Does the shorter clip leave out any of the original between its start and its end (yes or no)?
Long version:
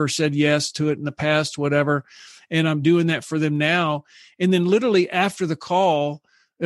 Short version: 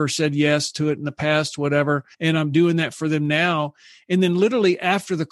yes